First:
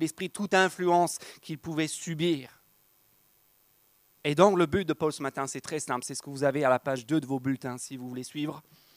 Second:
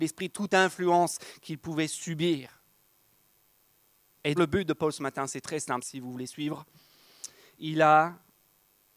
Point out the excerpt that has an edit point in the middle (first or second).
second